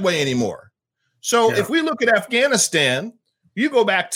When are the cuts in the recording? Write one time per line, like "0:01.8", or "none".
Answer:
none